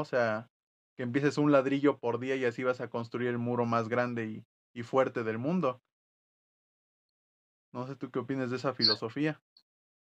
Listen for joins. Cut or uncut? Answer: uncut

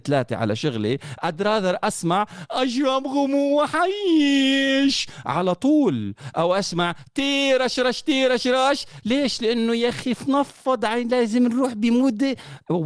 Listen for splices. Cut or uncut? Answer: uncut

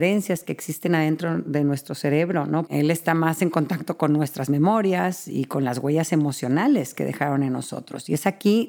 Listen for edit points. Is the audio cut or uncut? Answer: cut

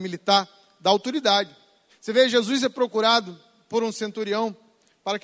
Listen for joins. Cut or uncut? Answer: cut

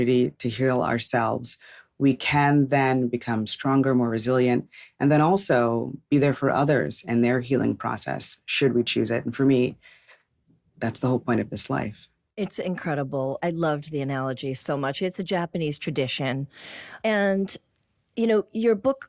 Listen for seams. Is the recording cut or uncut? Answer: uncut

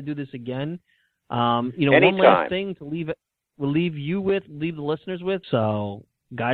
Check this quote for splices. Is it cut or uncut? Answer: cut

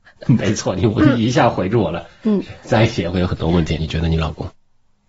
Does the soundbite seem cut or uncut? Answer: cut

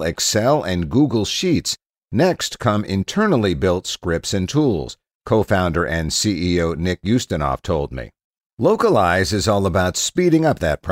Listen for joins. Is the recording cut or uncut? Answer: uncut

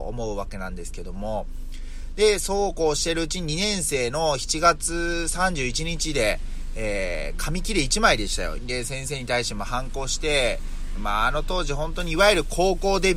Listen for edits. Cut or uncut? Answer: cut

